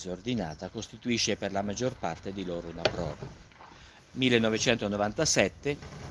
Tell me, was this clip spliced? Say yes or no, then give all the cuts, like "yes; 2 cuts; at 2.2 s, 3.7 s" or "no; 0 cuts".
yes; 1 cut; at 4.0 s